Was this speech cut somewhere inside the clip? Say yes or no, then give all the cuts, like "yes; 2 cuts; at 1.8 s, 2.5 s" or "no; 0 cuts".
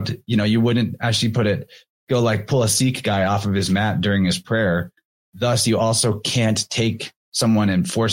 no; 0 cuts